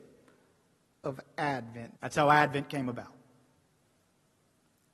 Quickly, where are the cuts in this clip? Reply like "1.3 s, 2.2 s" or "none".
2.0 s